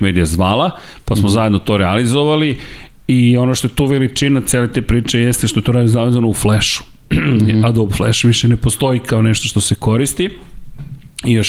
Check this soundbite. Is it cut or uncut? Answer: uncut